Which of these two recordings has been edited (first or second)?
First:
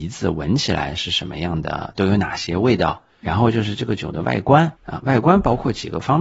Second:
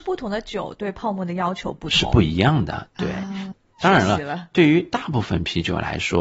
first